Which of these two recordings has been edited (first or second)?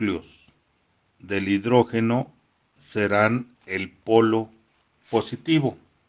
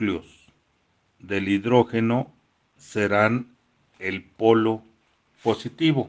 first